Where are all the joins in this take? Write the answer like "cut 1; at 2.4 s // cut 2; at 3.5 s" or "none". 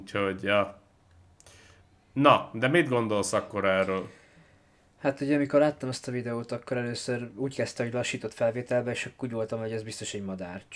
none

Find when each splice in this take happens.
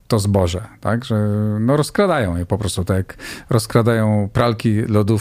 none

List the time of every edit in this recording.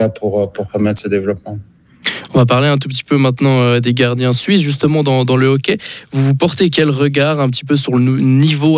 none

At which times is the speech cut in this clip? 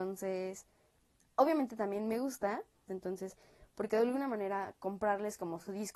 cut 1; at 2.9 s

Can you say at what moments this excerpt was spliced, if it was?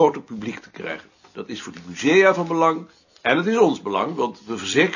none

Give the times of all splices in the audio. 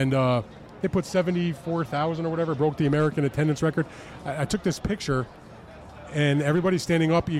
none

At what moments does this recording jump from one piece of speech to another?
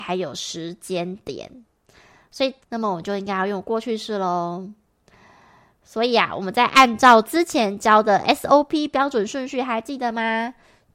cut 1; at 2.6 s

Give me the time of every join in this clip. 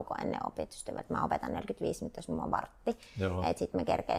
none

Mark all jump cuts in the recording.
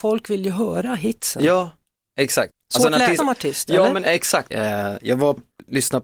cut 1; at 3.2 s // cut 2; at 4.5 s

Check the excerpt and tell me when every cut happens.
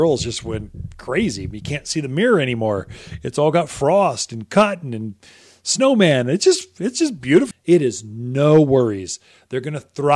cut 1; at 7.5 s

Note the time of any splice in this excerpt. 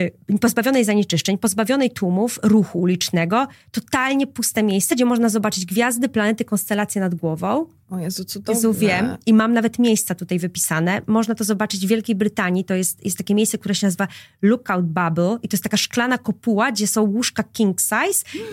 none

